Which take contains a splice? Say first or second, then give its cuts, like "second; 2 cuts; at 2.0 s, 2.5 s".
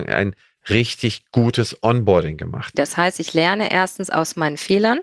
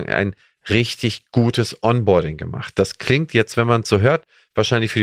first; 1 cut; at 2.7 s